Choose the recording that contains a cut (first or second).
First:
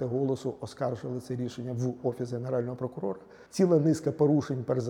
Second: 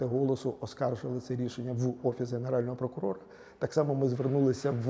first